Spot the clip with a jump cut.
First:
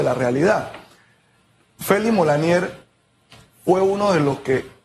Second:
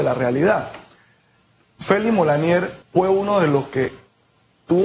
second; 1 cut; at 2.8 s

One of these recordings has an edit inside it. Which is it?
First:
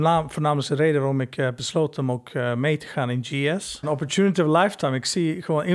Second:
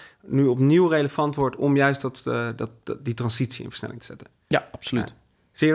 first; 1 cut; at 3.8 s

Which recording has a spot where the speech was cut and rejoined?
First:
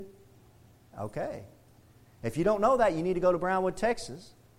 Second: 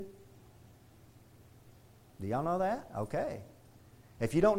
first; 1 cut; at 0.9 s

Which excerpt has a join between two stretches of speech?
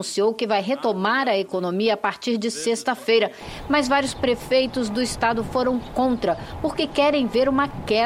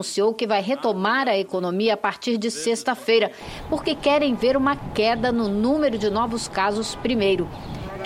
second; 1 cut; at 3.7 s

